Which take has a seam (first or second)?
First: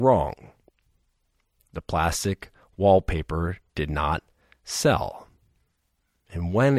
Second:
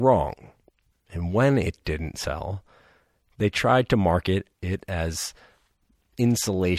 second